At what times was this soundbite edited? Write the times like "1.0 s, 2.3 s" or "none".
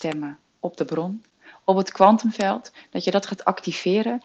none